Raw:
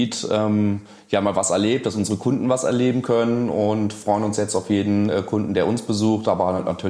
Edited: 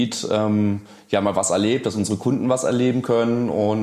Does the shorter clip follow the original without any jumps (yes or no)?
yes